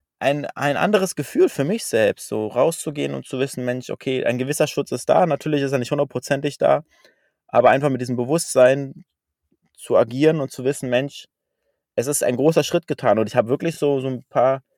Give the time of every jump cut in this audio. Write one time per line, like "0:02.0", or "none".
none